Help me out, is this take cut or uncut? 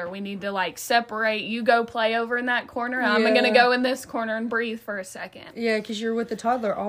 uncut